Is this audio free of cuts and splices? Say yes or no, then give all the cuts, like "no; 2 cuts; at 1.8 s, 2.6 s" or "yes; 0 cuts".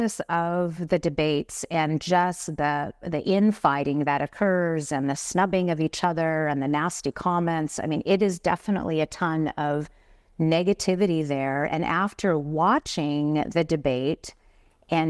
yes; 0 cuts